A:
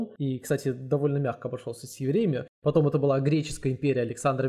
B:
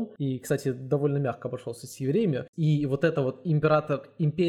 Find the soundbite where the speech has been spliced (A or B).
B